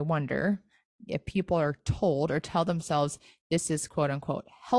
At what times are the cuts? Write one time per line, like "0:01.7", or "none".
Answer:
0:01.1